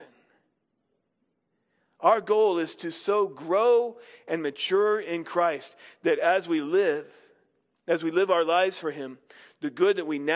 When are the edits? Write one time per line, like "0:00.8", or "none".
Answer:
none